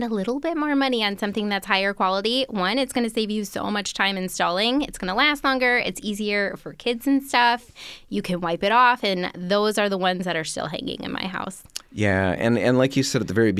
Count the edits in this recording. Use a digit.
0